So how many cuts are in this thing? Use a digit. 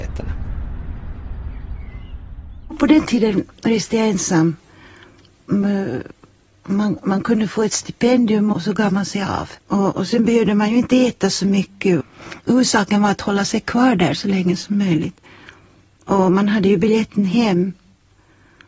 2